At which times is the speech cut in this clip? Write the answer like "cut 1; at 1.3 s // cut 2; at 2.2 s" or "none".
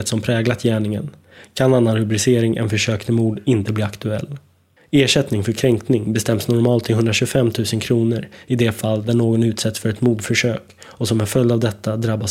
cut 1; at 4.8 s

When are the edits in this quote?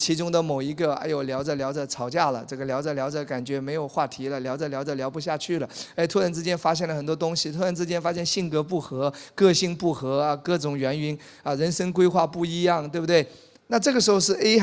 cut 1; at 13.6 s

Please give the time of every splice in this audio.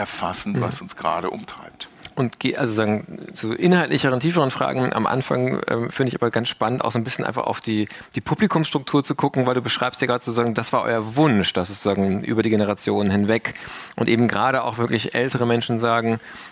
cut 1; at 3.3 s

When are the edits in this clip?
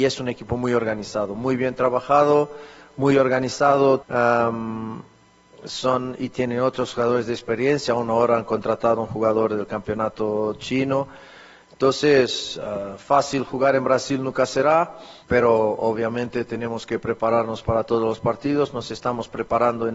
cut 1; at 4.0 s // cut 2; at 15.2 s

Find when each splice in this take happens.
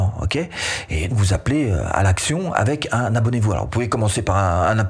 cut 1; at 1.1 s

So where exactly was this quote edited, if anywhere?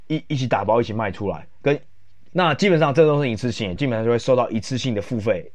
cut 1; at 2.3 s // cut 2; at 3.8 s

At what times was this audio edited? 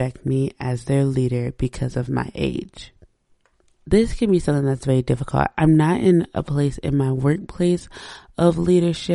none

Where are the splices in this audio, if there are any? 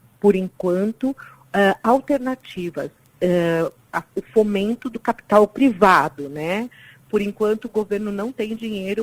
cut 1; at 3.8 s

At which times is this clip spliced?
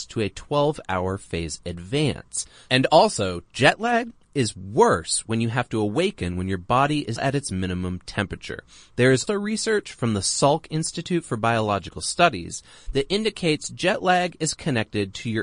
cut 1; at 7.2 s // cut 2; at 9.3 s

